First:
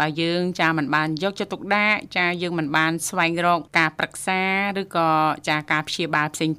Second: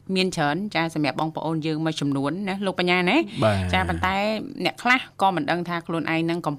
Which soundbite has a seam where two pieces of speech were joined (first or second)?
first